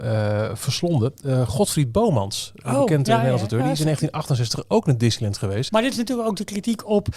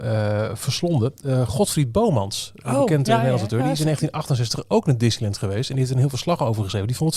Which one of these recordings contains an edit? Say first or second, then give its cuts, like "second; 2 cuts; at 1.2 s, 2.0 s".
first; 1 cut; at 5.7 s